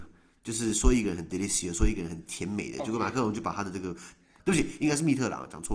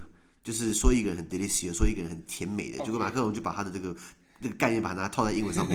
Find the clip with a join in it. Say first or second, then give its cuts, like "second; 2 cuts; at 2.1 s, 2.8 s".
first; 1 cut; at 4.4 s